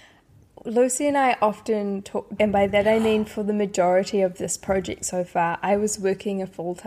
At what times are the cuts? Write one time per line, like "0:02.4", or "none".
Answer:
0:02.4